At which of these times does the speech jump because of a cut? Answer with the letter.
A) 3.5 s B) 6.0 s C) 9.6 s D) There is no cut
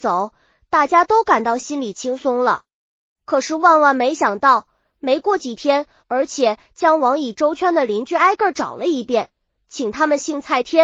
B